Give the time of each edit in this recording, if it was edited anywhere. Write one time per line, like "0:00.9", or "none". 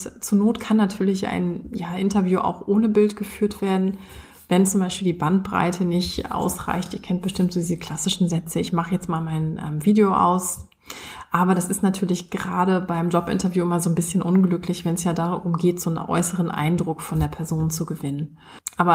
none

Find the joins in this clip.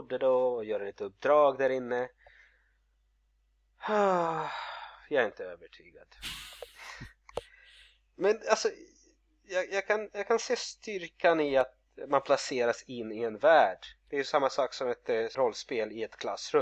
0:15.3

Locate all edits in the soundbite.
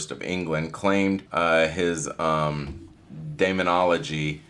0:01.3

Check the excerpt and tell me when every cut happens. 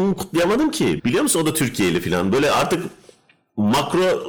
0:01.0

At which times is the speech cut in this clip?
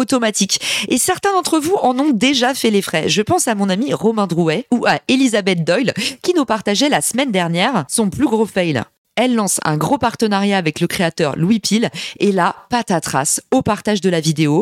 none

